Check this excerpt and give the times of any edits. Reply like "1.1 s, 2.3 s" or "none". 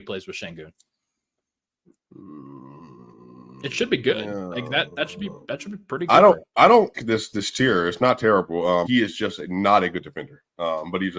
6.9 s, 8.9 s